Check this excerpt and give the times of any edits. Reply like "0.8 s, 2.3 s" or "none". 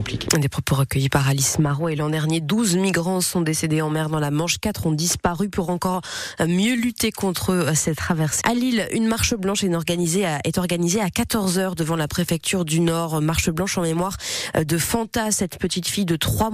8.4 s